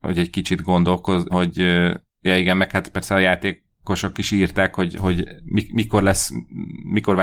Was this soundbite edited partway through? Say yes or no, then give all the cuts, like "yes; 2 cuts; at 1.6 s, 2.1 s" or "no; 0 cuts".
yes; 1 cut; at 1.3 s